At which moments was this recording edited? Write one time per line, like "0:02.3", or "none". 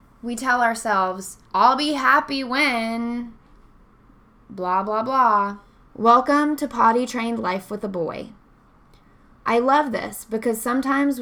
0:01.5
0:05.9
0:09.4